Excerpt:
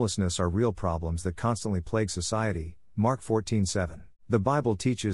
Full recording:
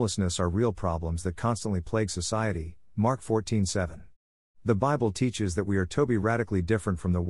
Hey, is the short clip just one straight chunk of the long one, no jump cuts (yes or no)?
no